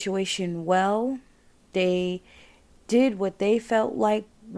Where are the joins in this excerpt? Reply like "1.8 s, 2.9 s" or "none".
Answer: none

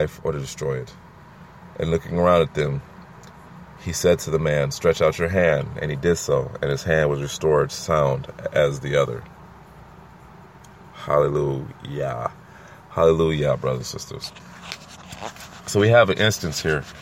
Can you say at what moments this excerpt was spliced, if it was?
none

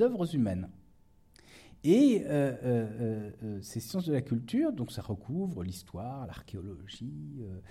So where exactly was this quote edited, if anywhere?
none

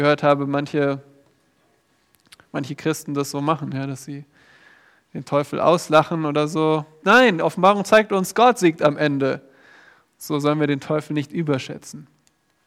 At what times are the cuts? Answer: 7.0 s

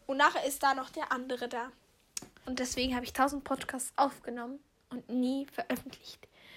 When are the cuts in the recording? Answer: 2.4 s

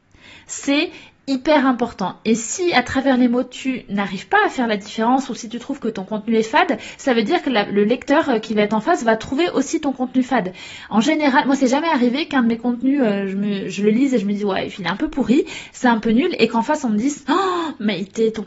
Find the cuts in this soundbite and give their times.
none

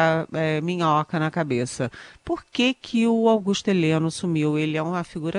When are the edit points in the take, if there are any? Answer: none

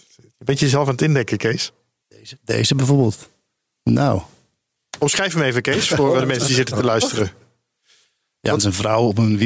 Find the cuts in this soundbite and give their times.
none

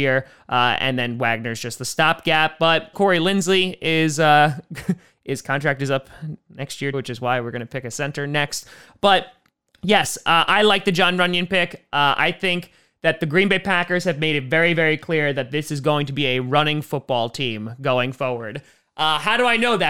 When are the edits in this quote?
2.9 s, 6.9 s

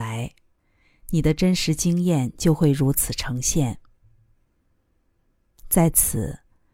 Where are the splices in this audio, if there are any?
none

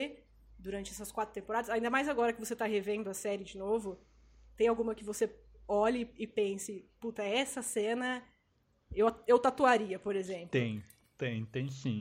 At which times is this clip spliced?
none

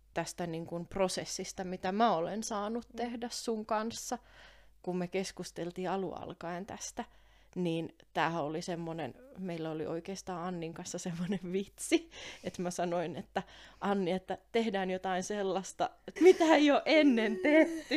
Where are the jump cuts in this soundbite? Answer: 16.2 s

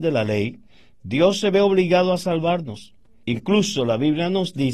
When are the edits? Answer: 3.2 s

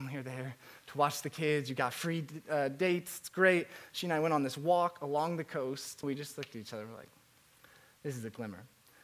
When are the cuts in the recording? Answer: 6.0 s

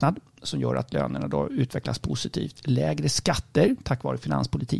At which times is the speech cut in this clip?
none

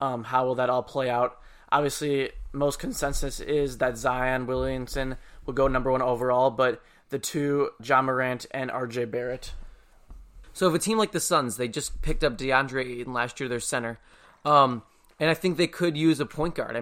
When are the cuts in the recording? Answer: 7.8 s, 10.4 s

